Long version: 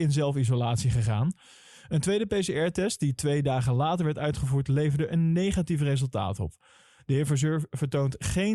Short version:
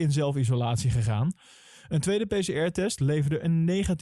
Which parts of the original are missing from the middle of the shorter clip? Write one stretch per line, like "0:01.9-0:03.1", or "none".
0:03.0-0:04.7